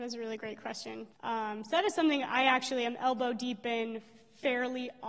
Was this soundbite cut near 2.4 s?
no; 1 cut; at 1.1 s

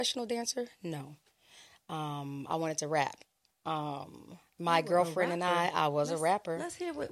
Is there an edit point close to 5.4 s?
no; 1 cut; at 3.5 s

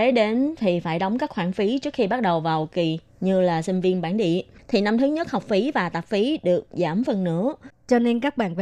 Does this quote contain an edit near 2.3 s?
no; 1 cut; at 7.7 s

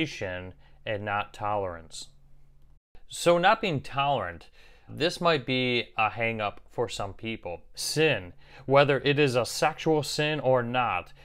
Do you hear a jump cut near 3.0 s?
no; 2 cuts; at 4.9 s, 7.7 s

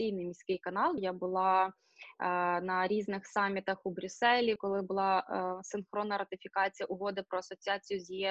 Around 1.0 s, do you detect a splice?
yes; 2 cuts; at 1.0 s, 4.6 s

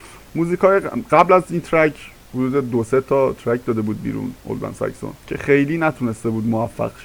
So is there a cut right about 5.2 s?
yes; 1 cut; at 5.2 s

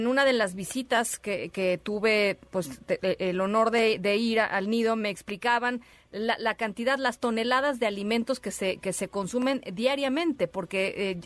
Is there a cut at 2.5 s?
no; 0 cuts

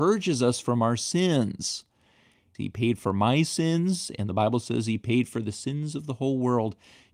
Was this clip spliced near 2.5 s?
yes; 1 cut; at 2.5 s

